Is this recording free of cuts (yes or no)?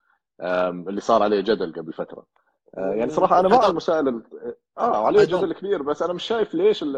yes